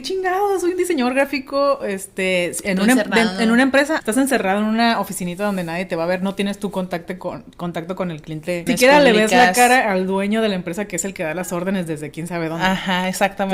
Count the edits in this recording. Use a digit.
2